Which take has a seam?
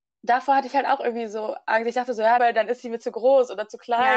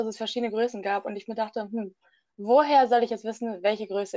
first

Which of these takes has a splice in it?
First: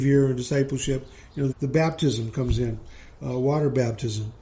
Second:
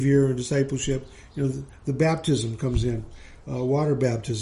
first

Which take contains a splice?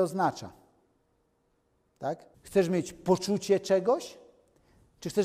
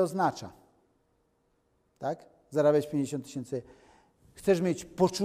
first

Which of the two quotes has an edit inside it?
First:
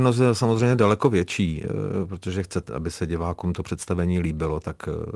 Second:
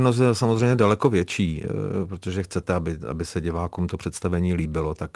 first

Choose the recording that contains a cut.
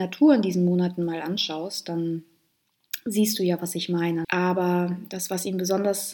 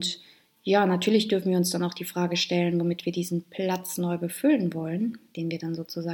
first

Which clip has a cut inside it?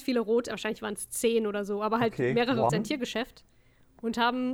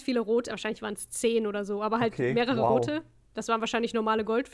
first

